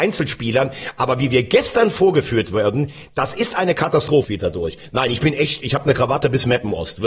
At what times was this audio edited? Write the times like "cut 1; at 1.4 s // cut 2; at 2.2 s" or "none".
cut 1; at 4.2 s